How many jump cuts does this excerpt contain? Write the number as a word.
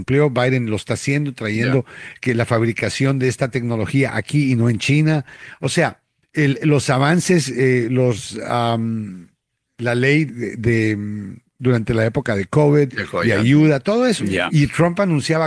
two